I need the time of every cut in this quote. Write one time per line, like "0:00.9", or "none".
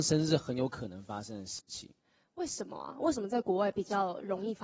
none